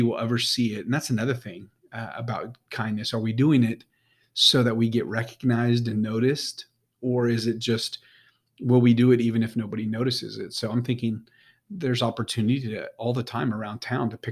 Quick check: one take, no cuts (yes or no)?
yes